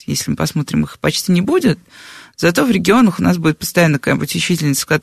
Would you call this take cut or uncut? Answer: uncut